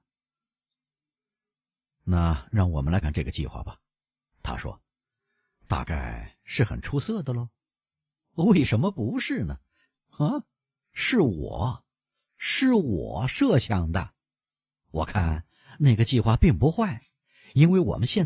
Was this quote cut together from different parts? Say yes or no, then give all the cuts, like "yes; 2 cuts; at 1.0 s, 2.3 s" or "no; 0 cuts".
yes; 2 cuts; at 3.0 s, 9.9 s